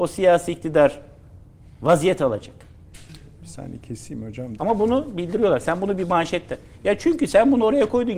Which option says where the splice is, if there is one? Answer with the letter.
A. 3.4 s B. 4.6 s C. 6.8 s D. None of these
B